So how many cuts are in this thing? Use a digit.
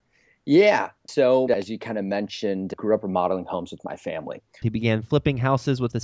2